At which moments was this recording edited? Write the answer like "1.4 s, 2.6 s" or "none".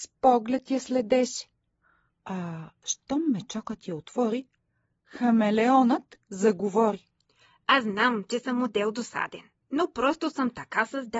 2.1 s